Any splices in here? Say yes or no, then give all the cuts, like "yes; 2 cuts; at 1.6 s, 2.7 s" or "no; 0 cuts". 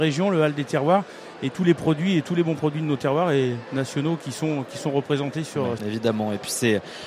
yes; 1 cut; at 5.8 s